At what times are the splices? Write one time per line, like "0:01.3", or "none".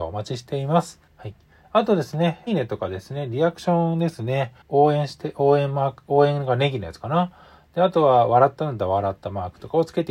0:01.1
0:02.5
0:04.6